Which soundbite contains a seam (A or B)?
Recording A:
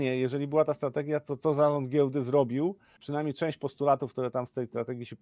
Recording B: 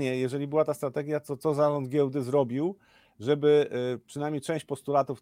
A